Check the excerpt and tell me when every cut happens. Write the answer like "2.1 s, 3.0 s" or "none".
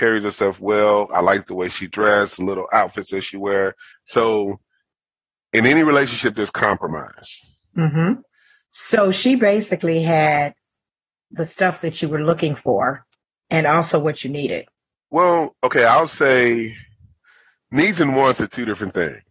3.9 s, 8.7 s